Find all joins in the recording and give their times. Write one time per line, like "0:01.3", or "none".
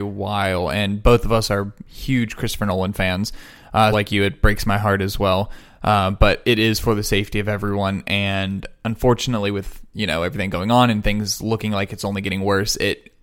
0:03.9